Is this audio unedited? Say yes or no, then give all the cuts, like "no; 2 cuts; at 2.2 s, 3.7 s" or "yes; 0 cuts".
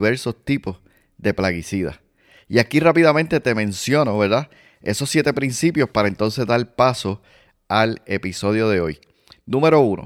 yes; 0 cuts